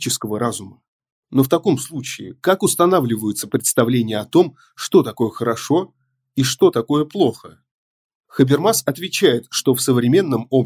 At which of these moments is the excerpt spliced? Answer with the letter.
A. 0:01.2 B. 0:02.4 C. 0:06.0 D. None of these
A